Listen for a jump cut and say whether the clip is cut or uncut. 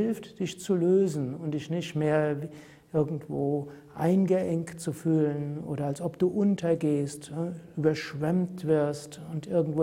uncut